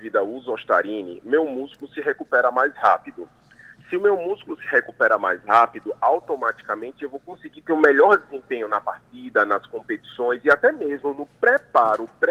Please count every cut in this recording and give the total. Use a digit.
0